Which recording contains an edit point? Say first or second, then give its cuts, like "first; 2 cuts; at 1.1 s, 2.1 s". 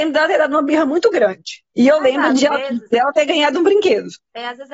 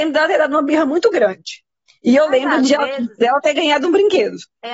first; 1 cut; at 1.7 s